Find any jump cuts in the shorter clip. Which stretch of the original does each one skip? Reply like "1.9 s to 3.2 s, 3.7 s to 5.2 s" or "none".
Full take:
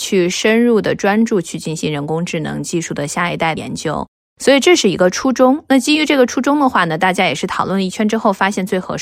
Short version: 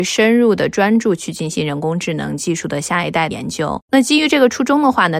4.2 s to 5.7 s